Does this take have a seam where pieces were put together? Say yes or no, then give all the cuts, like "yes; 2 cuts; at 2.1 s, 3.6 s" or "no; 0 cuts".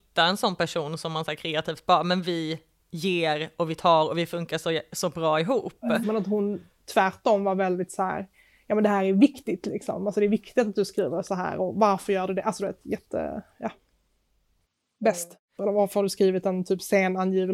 yes; 2 cuts; at 6.0 s, 15.6 s